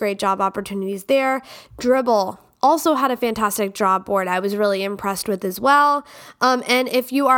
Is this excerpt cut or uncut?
uncut